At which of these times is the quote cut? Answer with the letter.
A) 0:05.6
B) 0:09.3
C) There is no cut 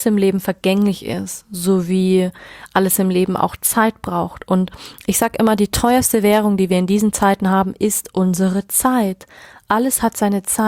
C